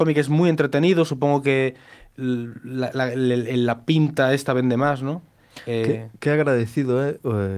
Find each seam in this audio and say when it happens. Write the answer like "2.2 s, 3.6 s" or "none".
none

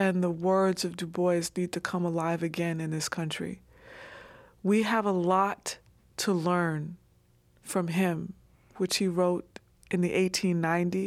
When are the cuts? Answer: 8.8 s

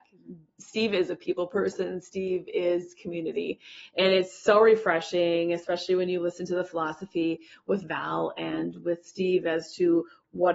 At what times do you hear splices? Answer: none

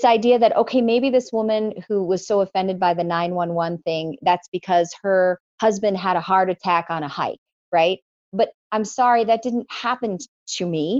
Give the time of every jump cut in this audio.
8.3 s

